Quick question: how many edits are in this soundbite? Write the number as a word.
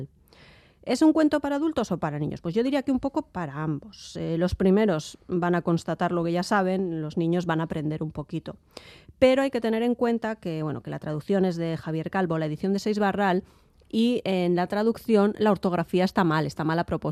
zero